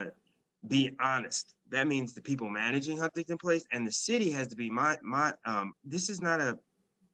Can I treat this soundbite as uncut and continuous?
no; 1 cut; at 5.7 s

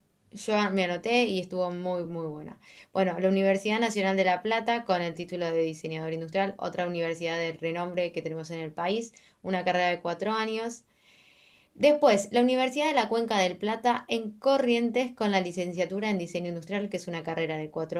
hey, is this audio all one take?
yes; 0 cuts

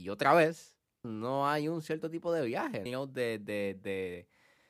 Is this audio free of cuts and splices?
no; 2 cuts; at 1.0 s, 2.9 s

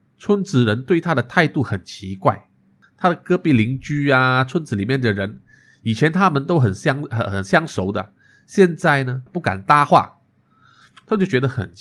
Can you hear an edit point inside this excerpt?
yes; 1 cut; at 9.3 s

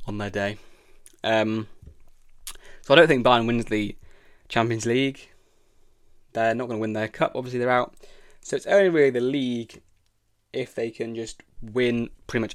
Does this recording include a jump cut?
no; 0 cuts

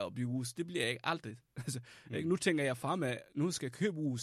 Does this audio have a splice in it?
no; 0 cuts

